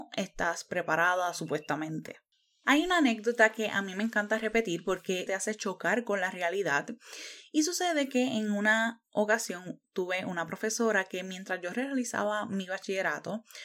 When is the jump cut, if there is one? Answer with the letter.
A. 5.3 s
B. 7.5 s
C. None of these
A